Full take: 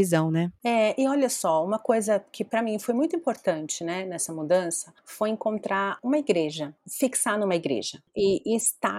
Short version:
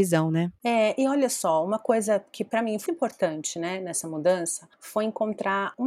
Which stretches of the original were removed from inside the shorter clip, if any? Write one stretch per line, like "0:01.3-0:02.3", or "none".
0:02.9-0:03.1